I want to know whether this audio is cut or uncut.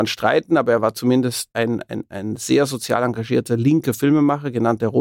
cut